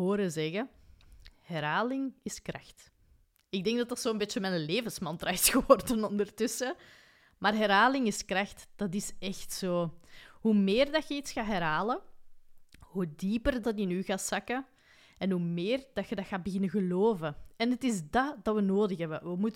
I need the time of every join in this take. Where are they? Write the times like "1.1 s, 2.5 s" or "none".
13.6 s